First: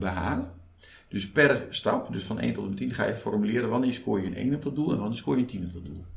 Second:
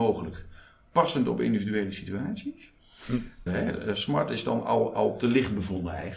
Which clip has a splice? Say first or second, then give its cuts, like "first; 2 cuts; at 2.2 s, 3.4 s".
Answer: second; 1 cut; at 3.5 s